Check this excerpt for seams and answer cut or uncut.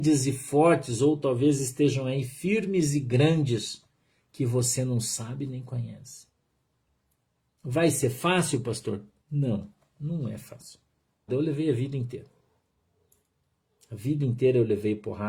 cut